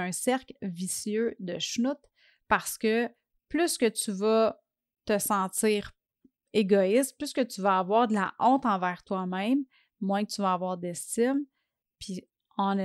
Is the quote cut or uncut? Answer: uncut